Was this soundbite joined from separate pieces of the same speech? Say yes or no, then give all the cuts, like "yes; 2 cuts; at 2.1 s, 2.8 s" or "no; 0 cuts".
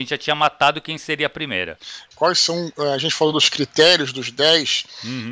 yes; 1 cut; at 2.1 s